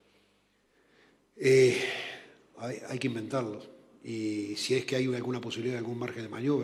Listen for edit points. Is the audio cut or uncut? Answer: cut